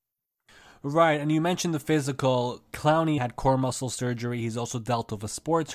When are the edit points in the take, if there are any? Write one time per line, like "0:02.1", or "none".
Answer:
0:03.2